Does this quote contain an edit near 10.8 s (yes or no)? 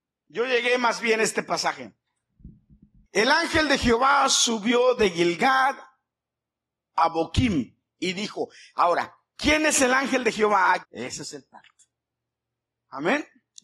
yes